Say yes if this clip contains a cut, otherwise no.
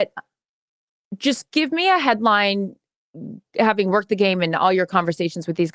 no